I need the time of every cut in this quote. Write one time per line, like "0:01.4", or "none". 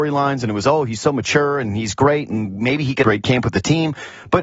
0:03.0